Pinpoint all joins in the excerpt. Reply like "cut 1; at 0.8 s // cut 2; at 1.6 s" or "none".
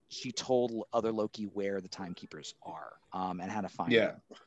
cut 1; at 3.0 s